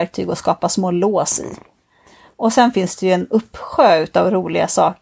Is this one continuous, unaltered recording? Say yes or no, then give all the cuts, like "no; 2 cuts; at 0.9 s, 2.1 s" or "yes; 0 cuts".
yes; 0 cuts